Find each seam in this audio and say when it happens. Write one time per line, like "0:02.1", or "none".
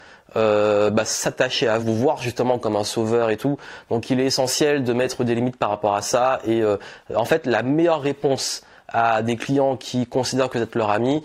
0:01.8